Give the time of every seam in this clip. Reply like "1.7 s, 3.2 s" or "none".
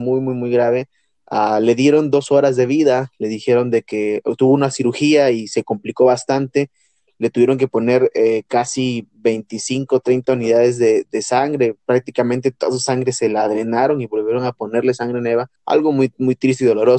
11.1 s, 15.6 s